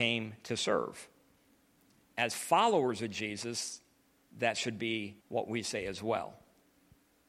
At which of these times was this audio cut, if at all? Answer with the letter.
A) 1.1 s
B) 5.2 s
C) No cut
B